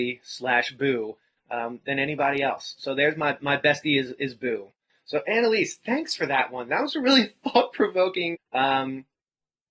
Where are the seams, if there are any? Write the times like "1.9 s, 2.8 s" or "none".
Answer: 8.3 s